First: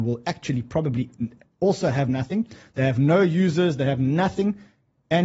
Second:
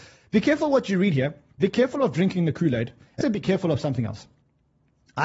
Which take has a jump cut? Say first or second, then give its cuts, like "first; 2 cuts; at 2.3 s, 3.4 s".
second; 1 cut; at 3.2 s